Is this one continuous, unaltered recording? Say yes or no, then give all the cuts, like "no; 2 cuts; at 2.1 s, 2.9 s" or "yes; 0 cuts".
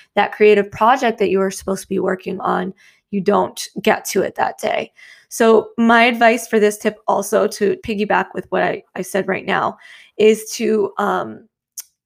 no; 1 cut; at 7.8 s